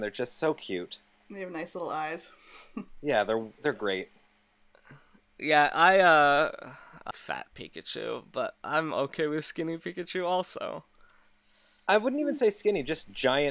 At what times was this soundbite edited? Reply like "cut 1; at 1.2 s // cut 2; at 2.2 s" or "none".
cut 1; at 7.1 s